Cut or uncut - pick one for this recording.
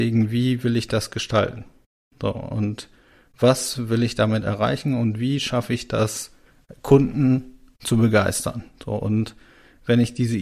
uncut